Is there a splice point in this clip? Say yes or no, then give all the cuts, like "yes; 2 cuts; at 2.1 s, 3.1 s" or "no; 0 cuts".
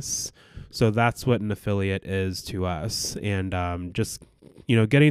no; 0 cuts